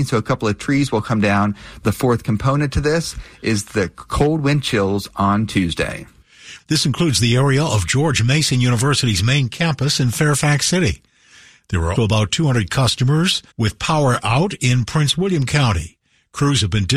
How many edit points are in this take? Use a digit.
3